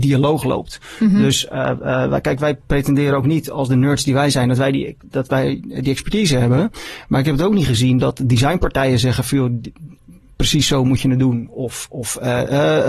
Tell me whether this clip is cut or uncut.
uncut